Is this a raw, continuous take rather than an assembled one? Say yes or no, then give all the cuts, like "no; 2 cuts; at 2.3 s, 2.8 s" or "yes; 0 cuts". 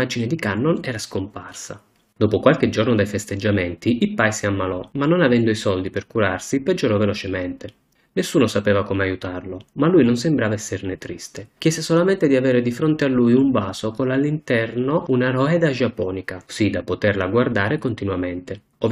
yes; 0 cuts